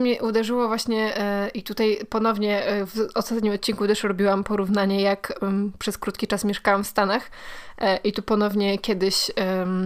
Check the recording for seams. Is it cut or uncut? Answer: uncut